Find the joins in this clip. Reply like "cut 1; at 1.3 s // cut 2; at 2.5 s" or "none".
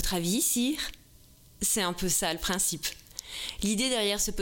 none